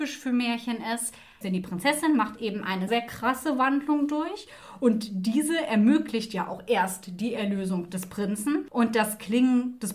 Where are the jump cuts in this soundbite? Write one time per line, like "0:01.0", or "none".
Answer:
0:01.4
0:02.9